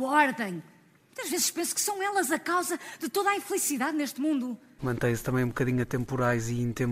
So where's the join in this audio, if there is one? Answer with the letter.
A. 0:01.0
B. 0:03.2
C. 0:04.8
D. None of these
C